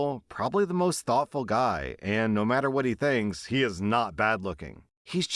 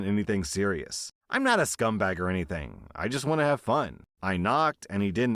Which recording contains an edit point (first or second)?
second